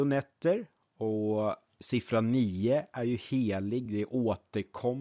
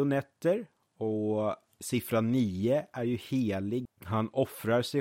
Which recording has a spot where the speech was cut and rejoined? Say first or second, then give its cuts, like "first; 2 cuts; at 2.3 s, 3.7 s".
second; 1 cut; at 3.9 s